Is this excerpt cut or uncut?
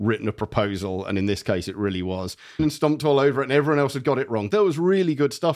cut